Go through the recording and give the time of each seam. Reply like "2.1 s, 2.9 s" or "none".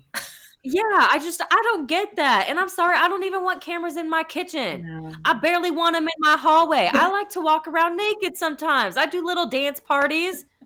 none